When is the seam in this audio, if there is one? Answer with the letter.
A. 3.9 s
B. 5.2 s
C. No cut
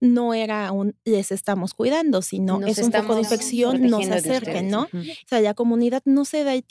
B